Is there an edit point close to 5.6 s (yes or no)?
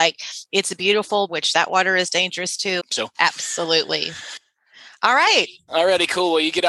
no